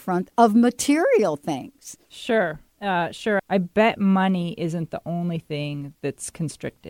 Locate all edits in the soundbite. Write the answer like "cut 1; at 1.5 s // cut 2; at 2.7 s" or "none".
cut 1; at 2.1 s // cut 2; at 3.4 s